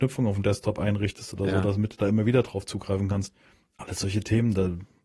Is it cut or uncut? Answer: uncut